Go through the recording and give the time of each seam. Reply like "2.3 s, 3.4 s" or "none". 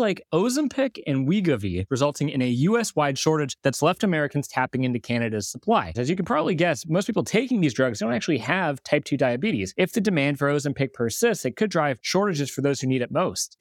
1.9 s, 5.9 s